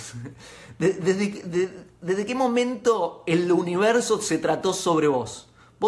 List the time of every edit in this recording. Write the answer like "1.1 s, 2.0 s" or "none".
none